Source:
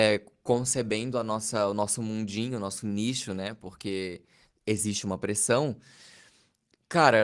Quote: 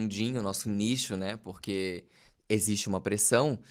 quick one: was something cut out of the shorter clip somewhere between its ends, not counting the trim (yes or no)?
no